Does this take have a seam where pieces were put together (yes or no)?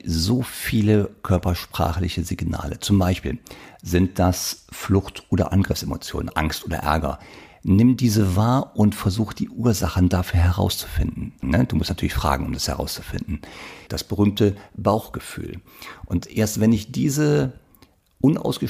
yes